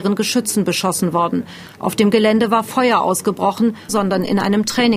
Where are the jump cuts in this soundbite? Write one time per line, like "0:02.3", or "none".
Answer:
0:03.9